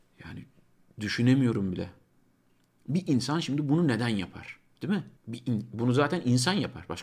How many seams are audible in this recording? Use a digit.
1